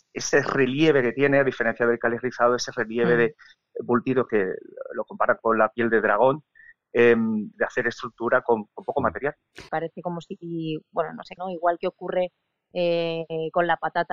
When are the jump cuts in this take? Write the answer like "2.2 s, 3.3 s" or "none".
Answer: 7.5 s, 9.7 s, 11.4 s

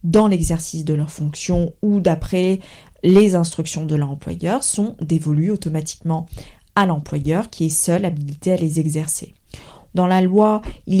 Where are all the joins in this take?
9.9 s

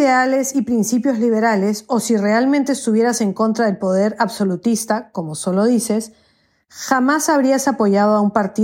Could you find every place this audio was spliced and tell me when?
none

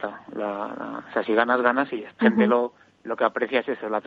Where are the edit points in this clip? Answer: 2.2 s

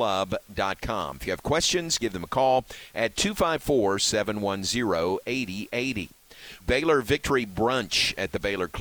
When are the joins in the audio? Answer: 6.6 s

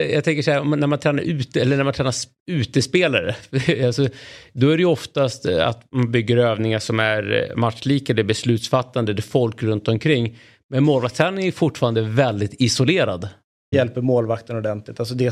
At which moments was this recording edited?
13.7 s

